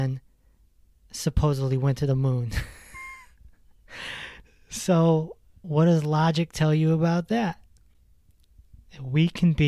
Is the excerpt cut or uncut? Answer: cut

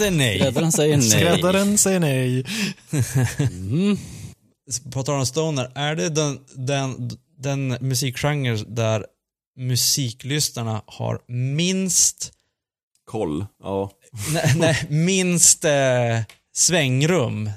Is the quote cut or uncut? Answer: uncut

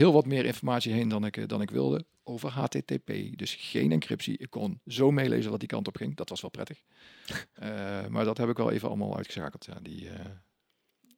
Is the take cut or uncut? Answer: uncut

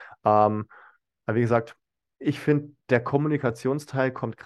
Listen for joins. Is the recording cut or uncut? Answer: uncut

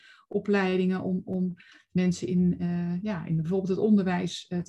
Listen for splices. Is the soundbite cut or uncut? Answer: uncut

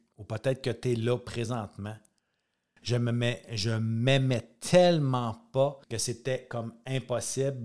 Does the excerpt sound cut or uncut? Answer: cut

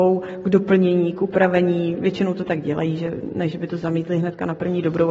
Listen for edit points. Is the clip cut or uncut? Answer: uncut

